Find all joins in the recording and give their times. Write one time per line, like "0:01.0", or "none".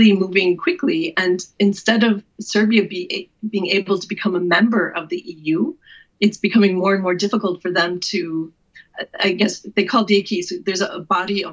none